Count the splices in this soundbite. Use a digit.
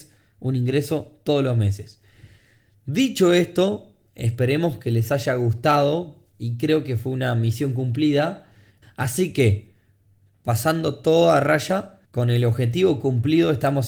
2